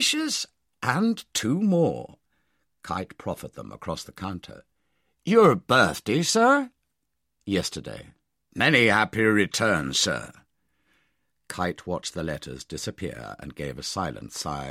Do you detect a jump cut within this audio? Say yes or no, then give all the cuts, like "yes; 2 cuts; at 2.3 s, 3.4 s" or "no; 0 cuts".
yes; 1 cut; at 8.5 s